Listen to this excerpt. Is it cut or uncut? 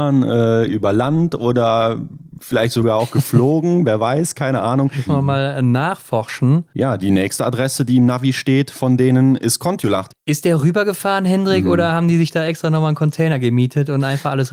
cut